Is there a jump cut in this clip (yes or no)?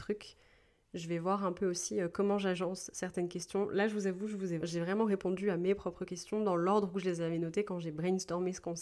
yes